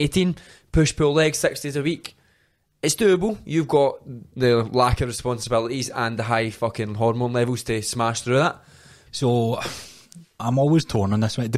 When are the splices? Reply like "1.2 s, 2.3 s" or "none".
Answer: 9.1 s, 10.4 s